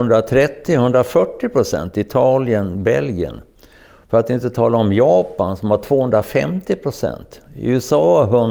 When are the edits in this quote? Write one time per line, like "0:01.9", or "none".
none